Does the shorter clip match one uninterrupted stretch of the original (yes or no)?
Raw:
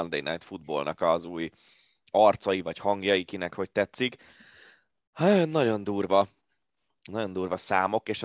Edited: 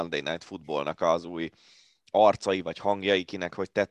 yes